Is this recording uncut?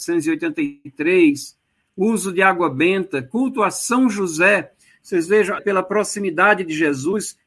no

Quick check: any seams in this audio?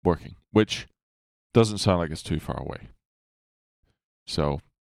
no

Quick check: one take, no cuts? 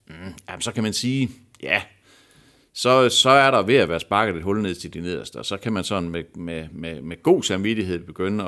yes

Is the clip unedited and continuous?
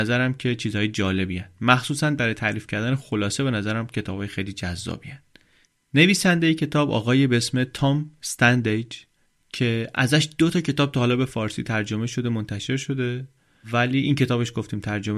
yes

